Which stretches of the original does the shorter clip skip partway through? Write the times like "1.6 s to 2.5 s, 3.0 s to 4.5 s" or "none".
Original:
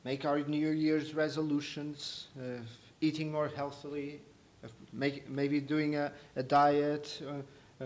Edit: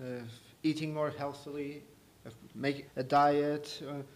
5.2 s to 6.2 s